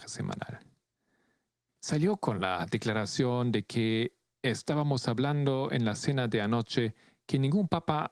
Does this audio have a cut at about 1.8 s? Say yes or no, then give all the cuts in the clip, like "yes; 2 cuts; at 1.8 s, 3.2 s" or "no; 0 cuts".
yes; 1 cut; at 1.8 s